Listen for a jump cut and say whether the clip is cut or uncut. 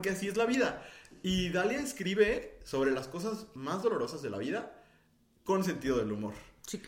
uncut